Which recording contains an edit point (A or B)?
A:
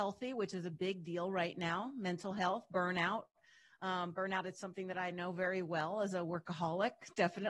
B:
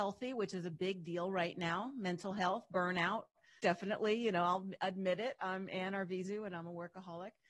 B